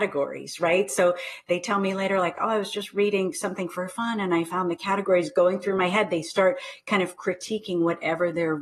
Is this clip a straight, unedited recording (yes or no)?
yes